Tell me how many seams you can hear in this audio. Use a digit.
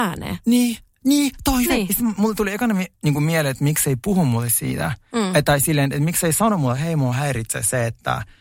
1